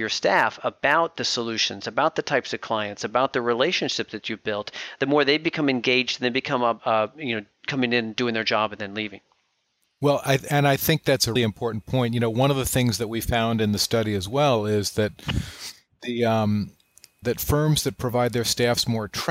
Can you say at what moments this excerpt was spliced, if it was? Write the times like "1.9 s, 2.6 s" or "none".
6.8 s, 11.4 s, 17.2 s